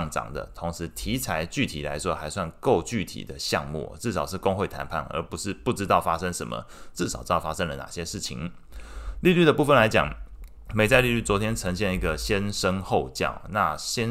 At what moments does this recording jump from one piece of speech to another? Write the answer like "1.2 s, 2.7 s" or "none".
6.9 s